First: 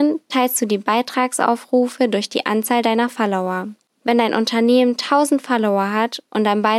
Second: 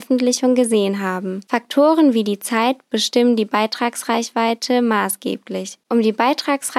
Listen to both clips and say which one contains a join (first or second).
second